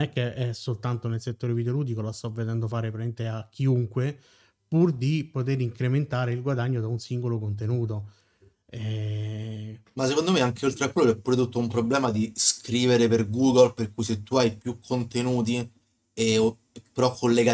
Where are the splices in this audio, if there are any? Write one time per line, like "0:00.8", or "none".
none